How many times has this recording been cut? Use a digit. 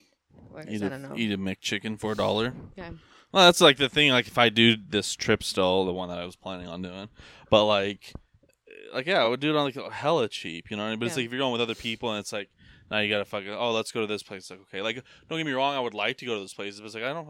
0